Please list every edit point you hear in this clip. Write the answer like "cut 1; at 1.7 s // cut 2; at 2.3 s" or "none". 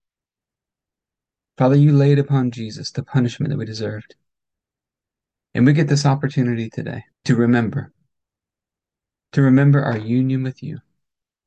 cut 1; at 5.4 s // cut 2; at 7.1 s